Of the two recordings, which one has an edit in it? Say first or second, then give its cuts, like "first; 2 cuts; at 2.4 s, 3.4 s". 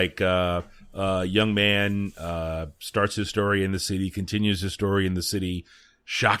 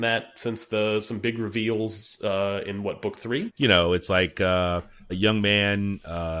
second; 2 cuts; at 3.5 s, 5.1 s